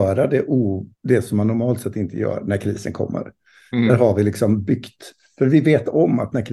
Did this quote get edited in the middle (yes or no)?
yes